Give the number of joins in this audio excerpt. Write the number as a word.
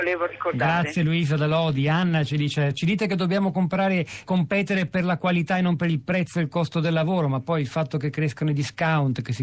one